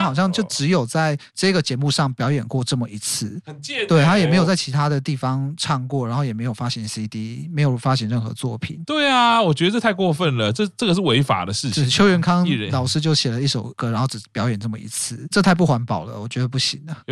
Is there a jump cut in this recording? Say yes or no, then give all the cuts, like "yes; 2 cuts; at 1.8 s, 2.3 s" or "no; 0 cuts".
no; 0 cuts